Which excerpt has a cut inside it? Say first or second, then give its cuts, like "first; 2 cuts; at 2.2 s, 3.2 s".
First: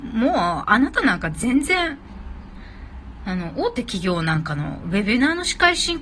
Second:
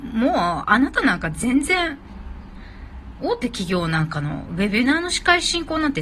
second; 1 cut; at 3.2 s